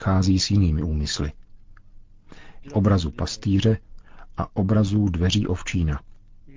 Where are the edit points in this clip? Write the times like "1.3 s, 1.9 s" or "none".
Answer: 2.6 s